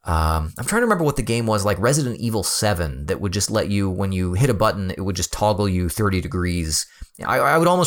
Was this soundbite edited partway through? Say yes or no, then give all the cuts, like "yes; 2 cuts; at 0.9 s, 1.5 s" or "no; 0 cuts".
no; 0 cuts